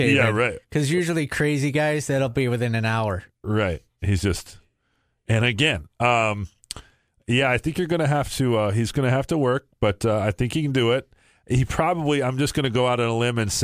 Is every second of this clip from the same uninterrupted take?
yes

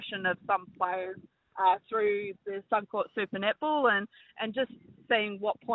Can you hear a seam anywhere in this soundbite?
no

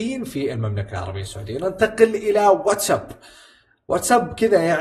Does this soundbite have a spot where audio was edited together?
no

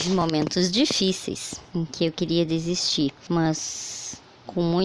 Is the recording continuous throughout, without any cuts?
no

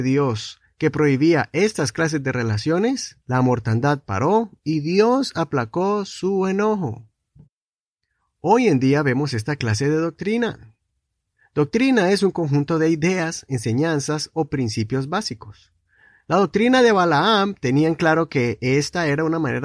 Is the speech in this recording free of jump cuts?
no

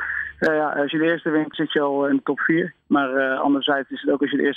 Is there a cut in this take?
yes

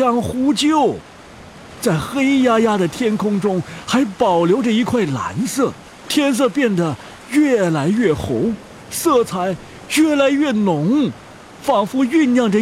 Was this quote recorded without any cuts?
no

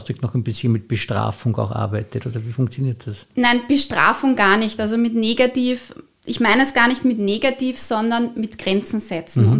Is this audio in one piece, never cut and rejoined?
yes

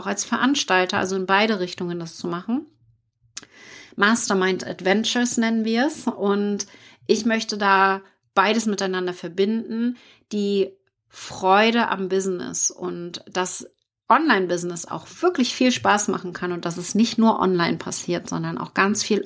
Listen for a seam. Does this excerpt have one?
no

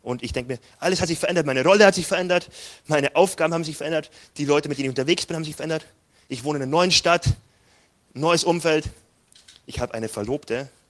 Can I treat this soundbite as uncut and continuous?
yes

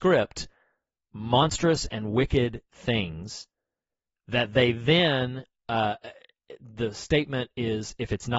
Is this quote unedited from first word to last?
yes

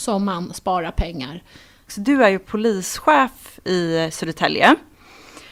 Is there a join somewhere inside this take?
yes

